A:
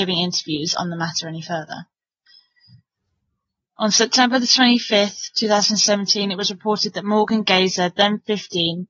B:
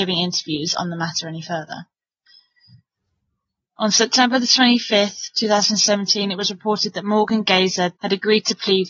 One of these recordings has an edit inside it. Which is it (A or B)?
B